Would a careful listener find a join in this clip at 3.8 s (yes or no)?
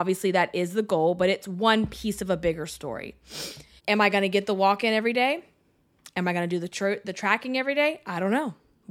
yes